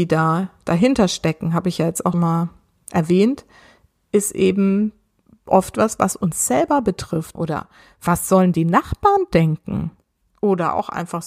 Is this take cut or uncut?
cut